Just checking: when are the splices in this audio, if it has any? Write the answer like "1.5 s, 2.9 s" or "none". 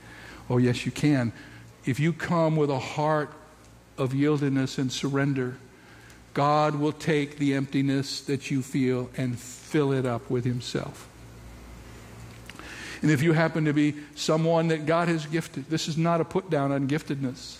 1.7 s